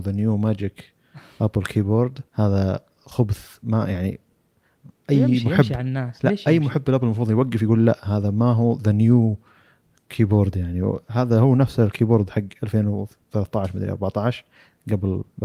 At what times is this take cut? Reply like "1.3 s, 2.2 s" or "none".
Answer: 2.3 s